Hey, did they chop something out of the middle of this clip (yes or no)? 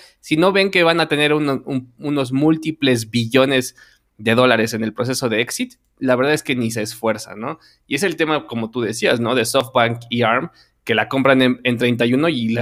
no